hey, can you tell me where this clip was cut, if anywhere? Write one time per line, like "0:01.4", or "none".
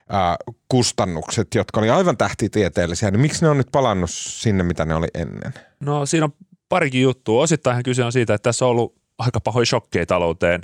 none